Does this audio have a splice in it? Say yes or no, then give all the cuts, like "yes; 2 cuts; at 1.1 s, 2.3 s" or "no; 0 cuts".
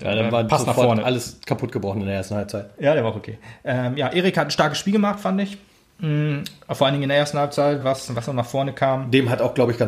yes; 2 cuts; at 2.8 s, 7.8 s